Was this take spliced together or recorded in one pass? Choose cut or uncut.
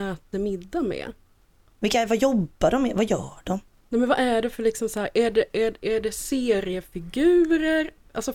uncut